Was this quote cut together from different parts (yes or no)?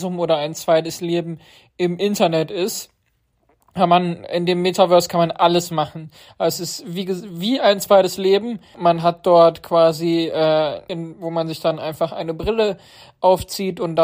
yes